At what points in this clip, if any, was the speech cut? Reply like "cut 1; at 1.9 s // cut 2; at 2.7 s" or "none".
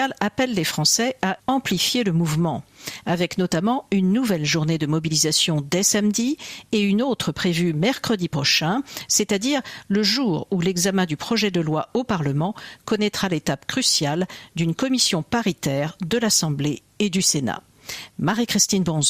cut 1; at 1.4 s